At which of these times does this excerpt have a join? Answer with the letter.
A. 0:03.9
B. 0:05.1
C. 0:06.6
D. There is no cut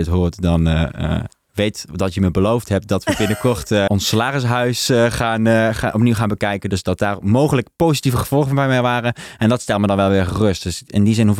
A